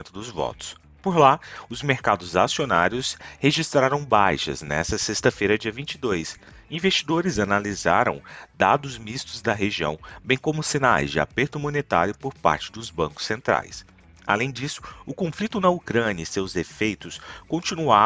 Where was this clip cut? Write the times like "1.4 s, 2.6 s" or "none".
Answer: none